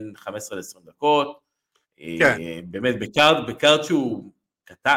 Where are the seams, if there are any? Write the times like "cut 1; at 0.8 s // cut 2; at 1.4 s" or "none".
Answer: none